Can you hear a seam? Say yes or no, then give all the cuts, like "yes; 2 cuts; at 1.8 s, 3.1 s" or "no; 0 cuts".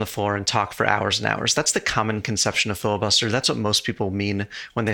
no; 0 cuts